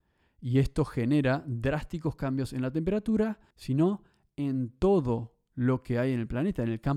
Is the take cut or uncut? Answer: cut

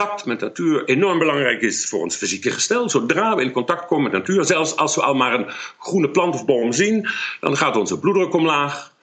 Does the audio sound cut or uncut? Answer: uncut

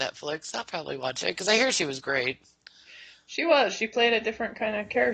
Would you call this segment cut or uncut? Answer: uncut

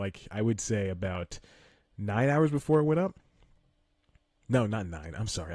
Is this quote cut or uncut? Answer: uncut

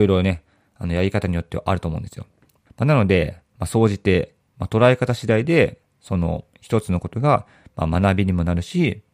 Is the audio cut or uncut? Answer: cut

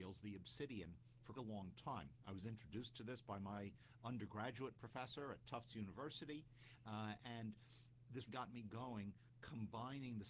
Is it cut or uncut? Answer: cut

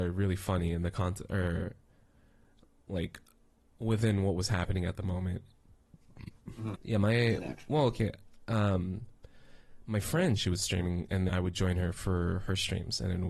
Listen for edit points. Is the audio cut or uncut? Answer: cut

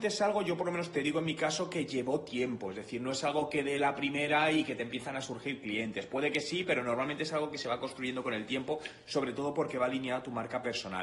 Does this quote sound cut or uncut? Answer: uncut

